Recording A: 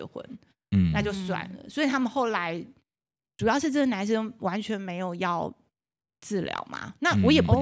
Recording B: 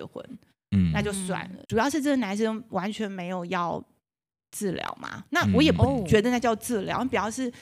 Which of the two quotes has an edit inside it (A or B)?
B